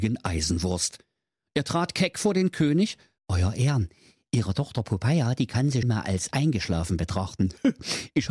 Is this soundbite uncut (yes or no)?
no